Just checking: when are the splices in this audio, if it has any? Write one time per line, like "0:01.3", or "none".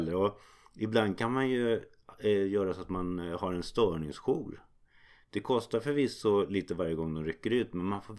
none